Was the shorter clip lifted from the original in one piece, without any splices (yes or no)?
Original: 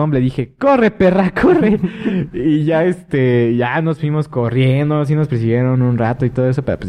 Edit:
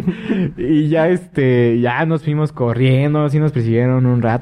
yes